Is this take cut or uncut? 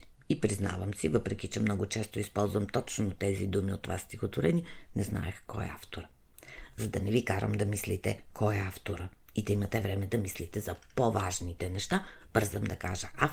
uncut